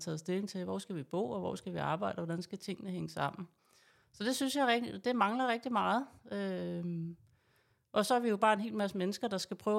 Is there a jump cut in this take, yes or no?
no